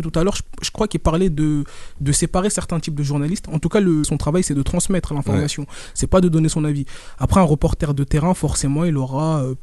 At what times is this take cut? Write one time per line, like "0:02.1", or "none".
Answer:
0:04.0